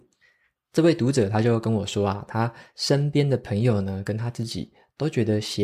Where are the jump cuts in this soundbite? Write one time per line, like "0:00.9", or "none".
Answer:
none